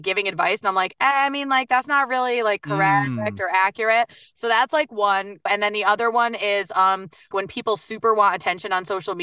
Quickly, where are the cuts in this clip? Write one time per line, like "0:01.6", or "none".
0:05.5
0:07.3